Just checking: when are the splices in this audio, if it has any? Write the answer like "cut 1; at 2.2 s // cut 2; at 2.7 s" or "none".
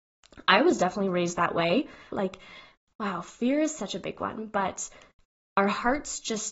cut 1; at 2.1 s